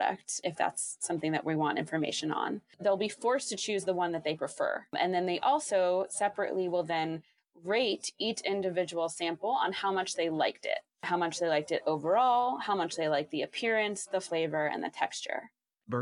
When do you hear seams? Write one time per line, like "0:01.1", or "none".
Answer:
none

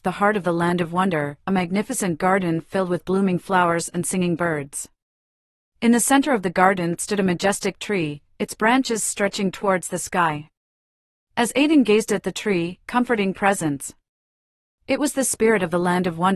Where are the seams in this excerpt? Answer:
0:12.8

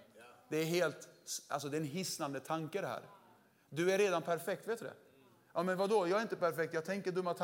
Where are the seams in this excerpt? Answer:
none

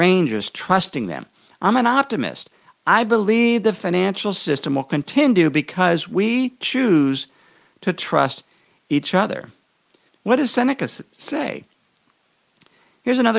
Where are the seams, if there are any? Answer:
0:10.1

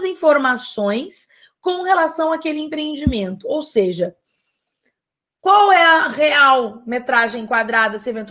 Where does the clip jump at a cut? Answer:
none

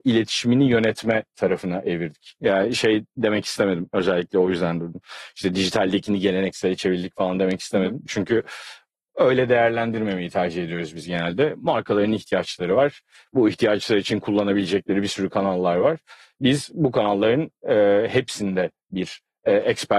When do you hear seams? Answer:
none

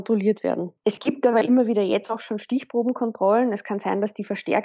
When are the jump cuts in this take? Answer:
none

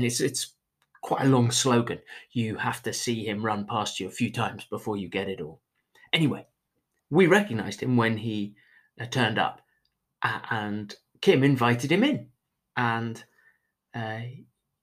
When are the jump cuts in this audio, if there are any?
0:07.0

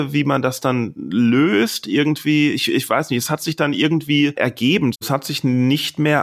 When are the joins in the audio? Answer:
0:04.9

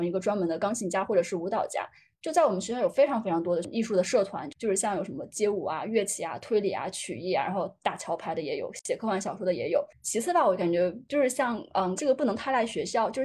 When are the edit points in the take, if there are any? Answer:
0:09.9
0:12.0

